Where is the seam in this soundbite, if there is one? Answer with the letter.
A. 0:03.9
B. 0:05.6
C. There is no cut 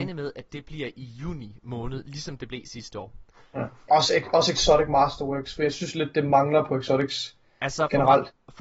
A